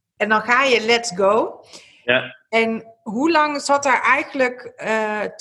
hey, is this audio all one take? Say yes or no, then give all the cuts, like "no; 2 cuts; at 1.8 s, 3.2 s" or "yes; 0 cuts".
yes; 0 cuts